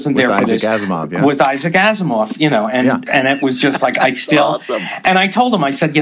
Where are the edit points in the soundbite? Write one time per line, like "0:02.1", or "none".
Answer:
0:03.1